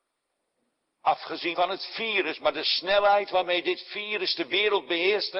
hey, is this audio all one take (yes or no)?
no